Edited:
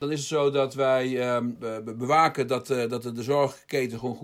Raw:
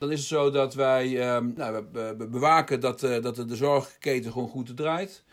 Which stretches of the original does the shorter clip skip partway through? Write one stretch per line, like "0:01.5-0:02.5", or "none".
0:01.6-0:01.9